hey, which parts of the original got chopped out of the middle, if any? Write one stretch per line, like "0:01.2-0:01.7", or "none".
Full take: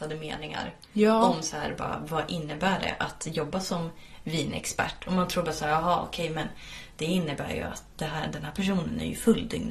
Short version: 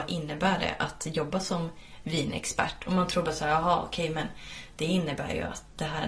none